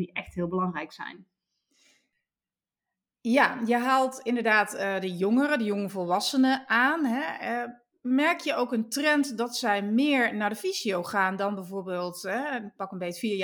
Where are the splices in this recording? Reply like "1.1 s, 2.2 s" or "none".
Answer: none